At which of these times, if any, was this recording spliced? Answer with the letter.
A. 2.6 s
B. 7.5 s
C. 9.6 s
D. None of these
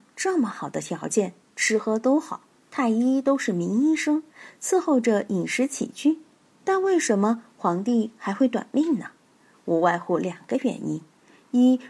D